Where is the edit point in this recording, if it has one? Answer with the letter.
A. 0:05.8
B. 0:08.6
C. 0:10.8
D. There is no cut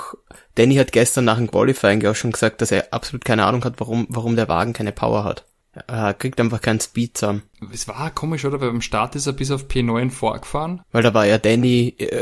C